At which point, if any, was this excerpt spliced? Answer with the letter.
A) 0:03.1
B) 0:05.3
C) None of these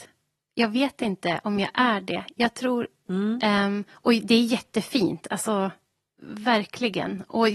A